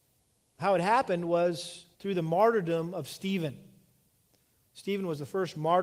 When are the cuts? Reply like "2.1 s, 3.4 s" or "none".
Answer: 1.9 s

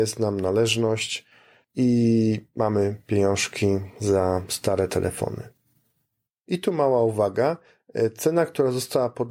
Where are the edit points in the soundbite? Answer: none

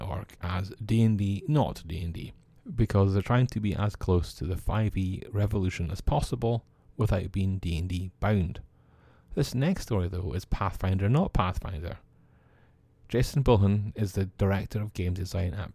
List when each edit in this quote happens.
none

